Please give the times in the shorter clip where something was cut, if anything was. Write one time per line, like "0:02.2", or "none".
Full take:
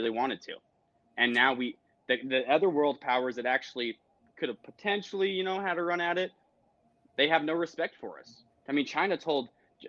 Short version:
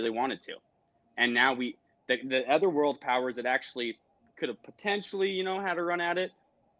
none